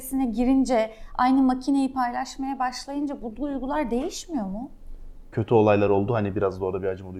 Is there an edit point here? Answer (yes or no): yes